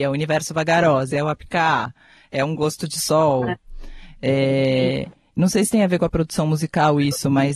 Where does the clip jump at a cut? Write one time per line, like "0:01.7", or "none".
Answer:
0:01.1